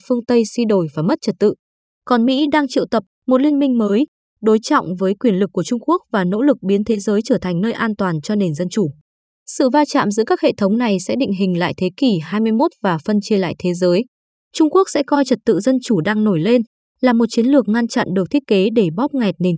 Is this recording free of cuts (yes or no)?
no